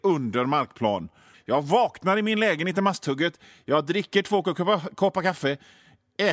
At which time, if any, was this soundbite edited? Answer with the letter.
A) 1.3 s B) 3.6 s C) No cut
A